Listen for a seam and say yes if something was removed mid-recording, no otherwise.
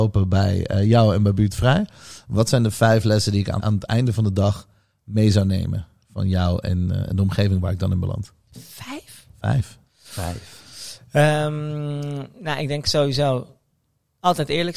yes